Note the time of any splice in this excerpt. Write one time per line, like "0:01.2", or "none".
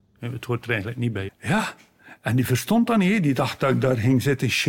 0:01.3